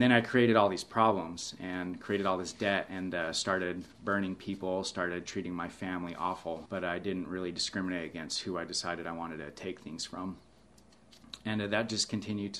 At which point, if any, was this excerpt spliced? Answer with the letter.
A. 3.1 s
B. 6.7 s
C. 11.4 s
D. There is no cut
B